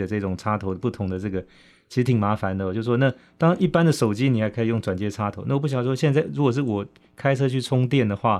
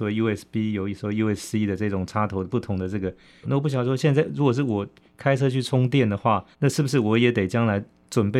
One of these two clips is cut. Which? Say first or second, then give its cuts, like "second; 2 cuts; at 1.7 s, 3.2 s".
second; 2 cuts; at 3.4 s, 6.5 s